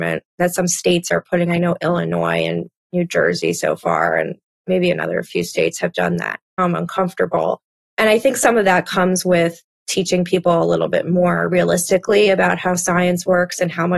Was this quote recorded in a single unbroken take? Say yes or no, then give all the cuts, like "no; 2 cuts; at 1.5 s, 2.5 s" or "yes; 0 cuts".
no; 1 cut; at 6.6 s